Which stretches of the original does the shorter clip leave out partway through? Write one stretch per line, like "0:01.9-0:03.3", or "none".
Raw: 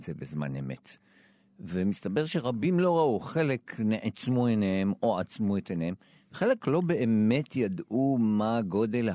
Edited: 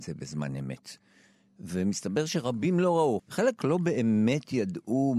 0:03.2-0:06.2